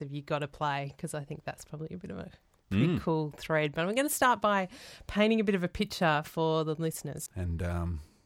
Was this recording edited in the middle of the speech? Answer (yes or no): yes